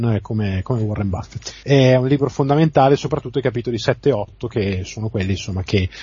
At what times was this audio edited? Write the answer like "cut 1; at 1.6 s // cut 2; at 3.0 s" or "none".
cut 1; at 1.6 s